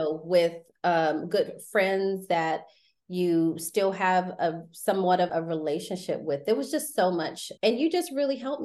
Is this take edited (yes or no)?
yes